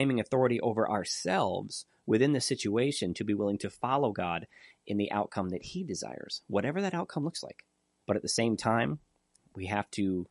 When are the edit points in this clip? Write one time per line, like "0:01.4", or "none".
0:08.0

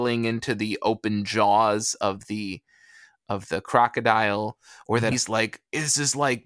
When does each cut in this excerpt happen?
0:05.1

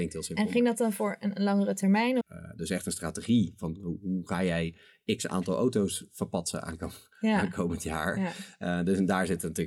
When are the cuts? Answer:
0:02.2

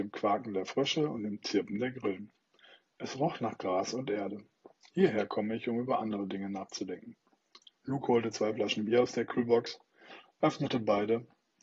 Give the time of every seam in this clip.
0:04.8
0:07.8

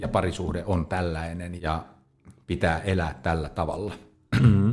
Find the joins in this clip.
0:01.6

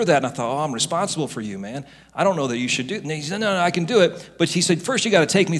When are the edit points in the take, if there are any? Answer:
none

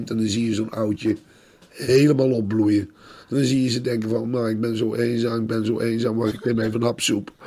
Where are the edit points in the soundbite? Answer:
0:06.3

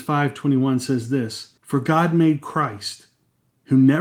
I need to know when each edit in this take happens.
0:01.6

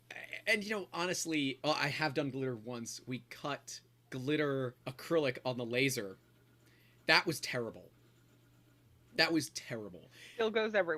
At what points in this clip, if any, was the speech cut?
0:01.6
0:04.8

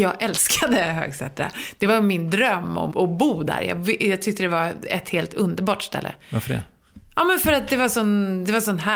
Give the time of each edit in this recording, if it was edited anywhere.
0:02.9

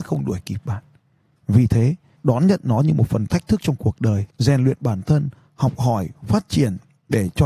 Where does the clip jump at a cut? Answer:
0:02.2
0:04.3

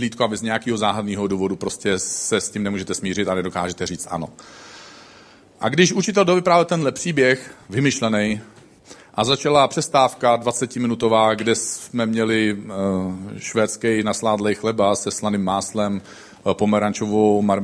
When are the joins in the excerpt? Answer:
none

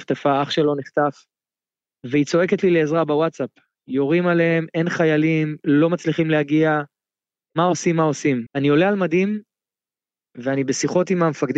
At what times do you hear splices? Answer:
0:08.5

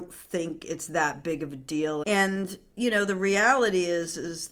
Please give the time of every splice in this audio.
0:02.0

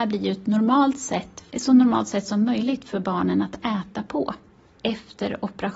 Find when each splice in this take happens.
0:01.5

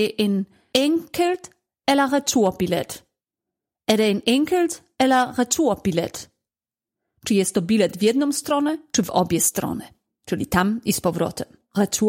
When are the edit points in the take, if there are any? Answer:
none

